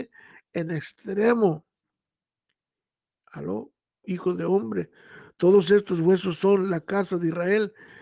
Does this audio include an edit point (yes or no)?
yes